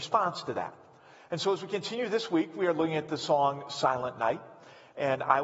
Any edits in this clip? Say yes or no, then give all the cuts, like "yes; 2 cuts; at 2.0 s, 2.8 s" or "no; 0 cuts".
no; 0 cuts